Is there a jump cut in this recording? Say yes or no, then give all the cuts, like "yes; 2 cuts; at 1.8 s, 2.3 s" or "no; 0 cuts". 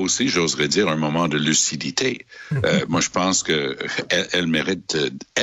no; 0 cuts